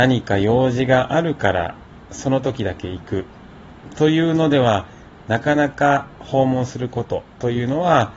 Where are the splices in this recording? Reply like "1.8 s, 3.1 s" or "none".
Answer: none